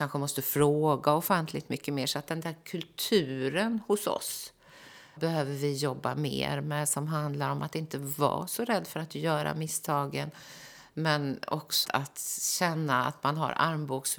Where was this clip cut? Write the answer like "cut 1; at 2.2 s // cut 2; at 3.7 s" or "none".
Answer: cut 1; at 5.2 s // cut 2; at 11.8 s